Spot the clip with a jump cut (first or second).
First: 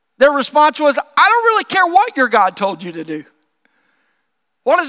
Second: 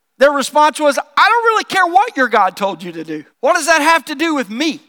second